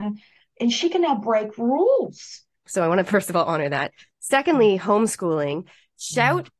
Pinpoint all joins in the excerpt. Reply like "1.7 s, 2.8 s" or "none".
2.7 s